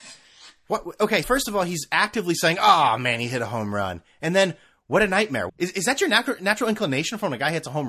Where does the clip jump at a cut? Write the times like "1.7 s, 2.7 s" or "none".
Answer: 1.2 s, 5.5 s